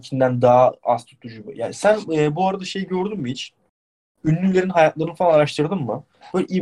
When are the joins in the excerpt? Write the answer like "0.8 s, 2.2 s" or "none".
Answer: none